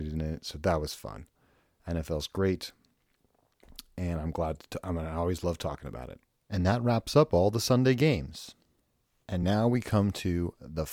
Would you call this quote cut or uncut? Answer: uncut